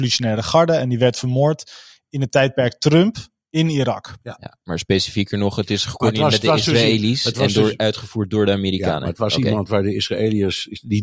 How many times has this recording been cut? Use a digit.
0